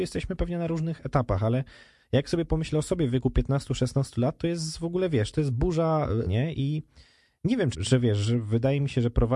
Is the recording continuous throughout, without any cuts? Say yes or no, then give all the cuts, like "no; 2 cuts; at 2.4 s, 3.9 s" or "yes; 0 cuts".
no; 2 cuts; at 6.2 s, 7.7 s